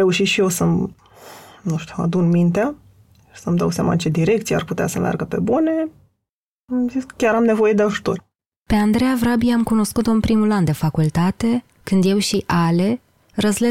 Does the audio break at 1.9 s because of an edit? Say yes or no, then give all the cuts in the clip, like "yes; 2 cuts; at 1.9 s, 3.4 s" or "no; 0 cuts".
no; 0 cuts